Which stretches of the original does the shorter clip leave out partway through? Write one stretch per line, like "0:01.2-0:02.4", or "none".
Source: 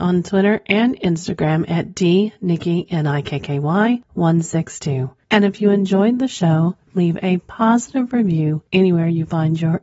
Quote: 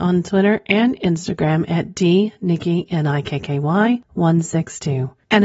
none